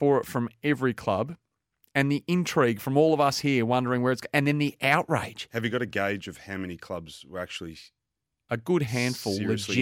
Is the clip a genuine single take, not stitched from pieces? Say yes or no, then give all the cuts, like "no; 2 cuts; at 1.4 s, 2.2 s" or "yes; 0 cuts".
yes; 0 cuts